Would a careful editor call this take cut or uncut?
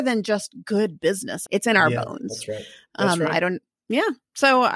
cut